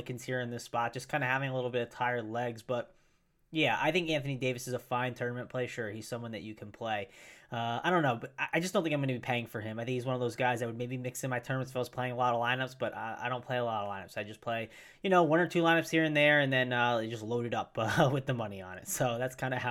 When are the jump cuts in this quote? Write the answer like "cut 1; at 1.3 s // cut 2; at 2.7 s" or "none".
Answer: none